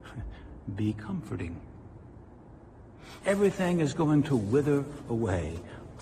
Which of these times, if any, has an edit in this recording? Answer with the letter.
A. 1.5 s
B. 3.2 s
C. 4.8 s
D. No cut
B